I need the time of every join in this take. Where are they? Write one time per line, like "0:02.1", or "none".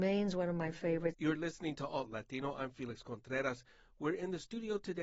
0:01.1